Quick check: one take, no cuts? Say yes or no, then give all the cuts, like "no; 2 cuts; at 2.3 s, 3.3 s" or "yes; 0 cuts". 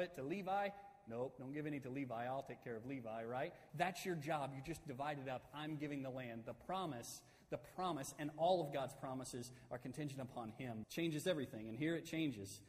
no; 2 cuts; at 3.7 s, 10.8 s